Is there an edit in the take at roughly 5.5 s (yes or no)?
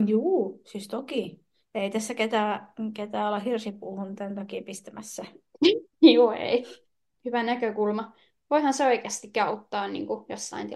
no